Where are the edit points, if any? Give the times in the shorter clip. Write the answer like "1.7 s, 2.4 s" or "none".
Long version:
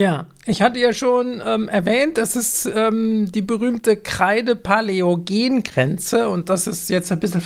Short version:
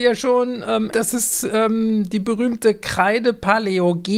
0.9 s